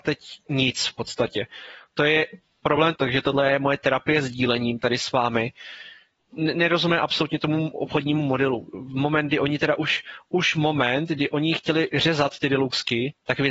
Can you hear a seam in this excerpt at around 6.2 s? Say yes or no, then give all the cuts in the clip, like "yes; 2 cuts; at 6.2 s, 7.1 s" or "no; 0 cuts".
yes; 2 cuts; at 3.0 s, 6.2 s